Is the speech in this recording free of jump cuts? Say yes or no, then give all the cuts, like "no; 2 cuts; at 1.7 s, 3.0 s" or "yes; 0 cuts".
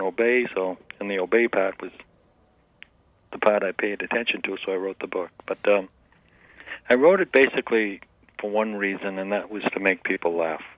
yes; 0 cuts